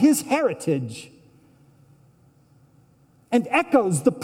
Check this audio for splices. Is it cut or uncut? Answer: uncut